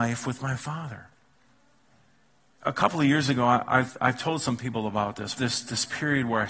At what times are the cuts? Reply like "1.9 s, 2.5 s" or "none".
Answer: 5.4 s